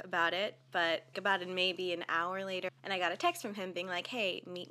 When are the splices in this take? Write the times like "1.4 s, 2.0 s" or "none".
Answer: 1.1 s, 2.7 s